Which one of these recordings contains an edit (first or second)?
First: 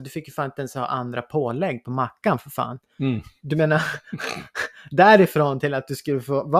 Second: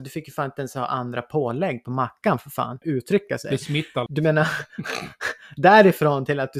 second